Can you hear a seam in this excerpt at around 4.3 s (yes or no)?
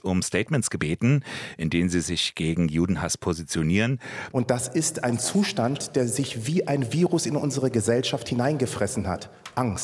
yes